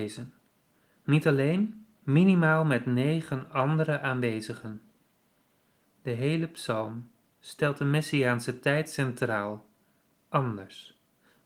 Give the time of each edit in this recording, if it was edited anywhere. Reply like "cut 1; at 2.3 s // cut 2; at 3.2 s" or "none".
cut 1; at 2.0 s // cut 2; at 5.8 s